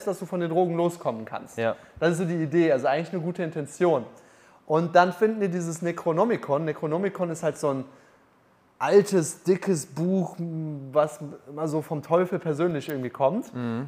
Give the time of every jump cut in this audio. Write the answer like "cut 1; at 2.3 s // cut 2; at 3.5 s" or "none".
none